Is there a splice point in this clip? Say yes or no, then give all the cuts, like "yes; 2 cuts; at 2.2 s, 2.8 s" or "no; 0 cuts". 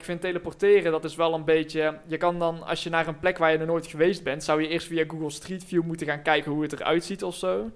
no; 0 cuts